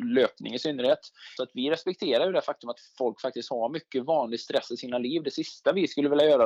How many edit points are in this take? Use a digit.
1